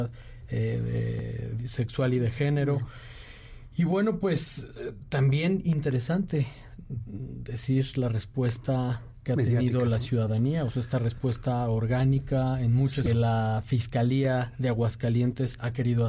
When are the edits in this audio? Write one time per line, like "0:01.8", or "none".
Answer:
0:13.1